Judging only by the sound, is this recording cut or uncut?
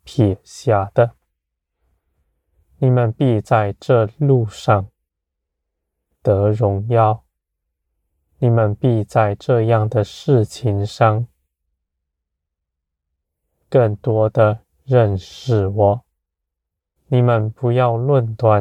cut